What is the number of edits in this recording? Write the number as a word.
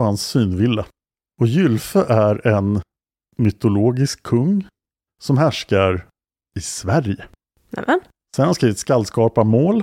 one